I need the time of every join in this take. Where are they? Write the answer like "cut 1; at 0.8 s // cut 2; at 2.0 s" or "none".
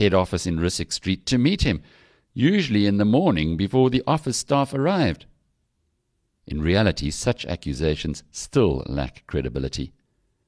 none